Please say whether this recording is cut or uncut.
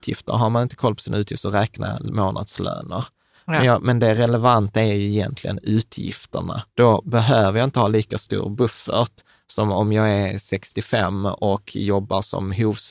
cut